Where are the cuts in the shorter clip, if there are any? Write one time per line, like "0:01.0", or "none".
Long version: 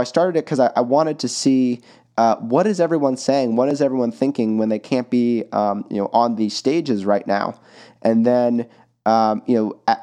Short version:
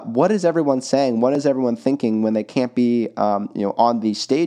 none